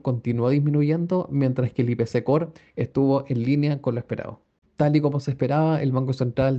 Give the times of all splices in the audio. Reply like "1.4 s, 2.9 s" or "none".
4.7 s